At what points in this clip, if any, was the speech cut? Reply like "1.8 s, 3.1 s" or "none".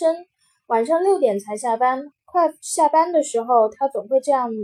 2.1 s